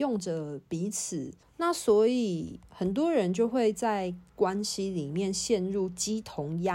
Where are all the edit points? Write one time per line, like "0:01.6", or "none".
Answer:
0:01.4
0:02.7